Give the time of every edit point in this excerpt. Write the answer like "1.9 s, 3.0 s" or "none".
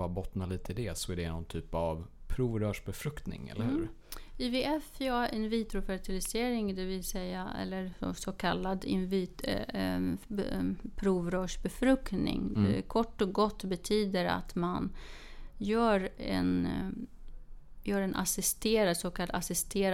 none